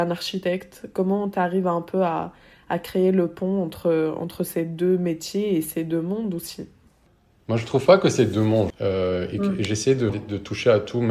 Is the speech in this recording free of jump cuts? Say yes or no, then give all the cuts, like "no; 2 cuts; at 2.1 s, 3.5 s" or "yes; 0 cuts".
no; 2 cuts; at 8.7 s, 10.1 s